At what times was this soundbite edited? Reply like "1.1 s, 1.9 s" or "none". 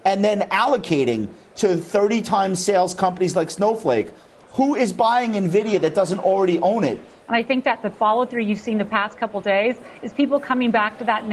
7.3 s